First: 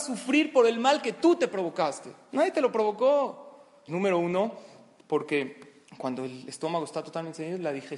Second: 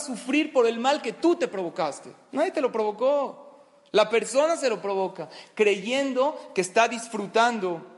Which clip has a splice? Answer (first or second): first